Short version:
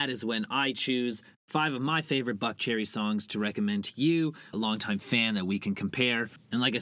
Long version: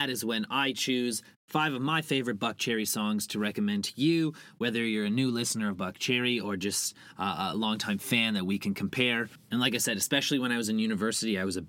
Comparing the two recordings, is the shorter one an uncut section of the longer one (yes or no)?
no